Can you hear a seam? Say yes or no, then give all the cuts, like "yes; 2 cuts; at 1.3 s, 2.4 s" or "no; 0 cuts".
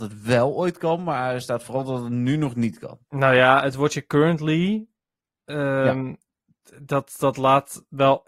no; 0 cuts